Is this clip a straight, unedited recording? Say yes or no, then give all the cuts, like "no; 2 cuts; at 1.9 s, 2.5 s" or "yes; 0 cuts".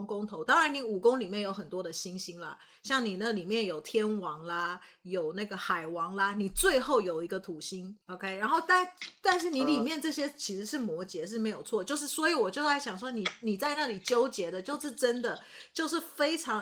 yes; 0 cuts